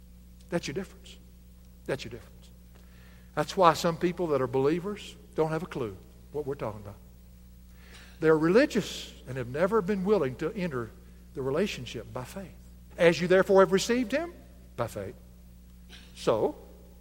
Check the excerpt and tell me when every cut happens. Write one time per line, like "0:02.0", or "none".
0:12.9